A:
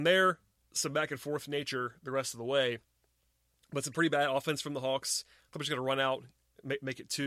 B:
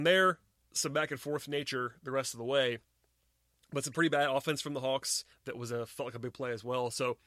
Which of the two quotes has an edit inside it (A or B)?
B